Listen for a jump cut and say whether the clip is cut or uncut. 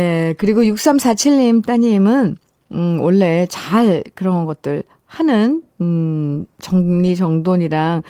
uncut